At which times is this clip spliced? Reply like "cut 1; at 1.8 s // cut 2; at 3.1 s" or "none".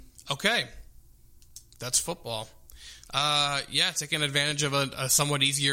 cut 1; at 3.1 s